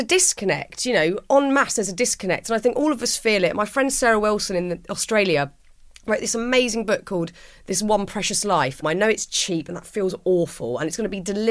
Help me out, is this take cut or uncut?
cut